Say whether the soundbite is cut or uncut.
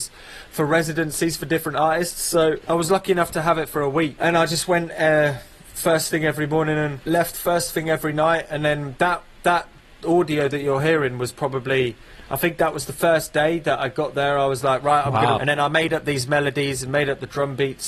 cut